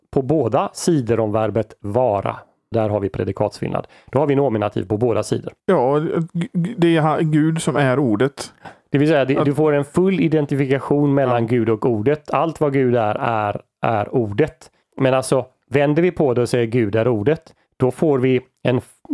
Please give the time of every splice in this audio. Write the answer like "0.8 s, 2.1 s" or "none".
2.7 s, 5.6 s, 14.8 s